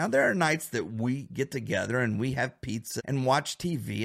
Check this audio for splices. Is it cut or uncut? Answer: cut